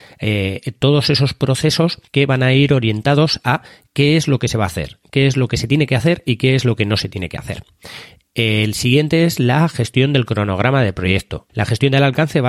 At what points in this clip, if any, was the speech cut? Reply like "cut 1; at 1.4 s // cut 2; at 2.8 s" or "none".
cut 1; at 2.1 s // cut 2; at 11.5 s